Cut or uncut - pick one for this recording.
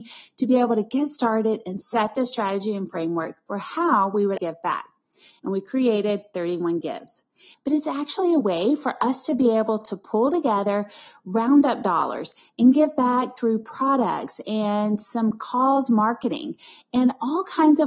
cut